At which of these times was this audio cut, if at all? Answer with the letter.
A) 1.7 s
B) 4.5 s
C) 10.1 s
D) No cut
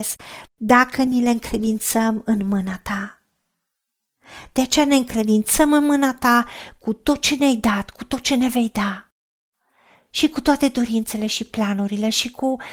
D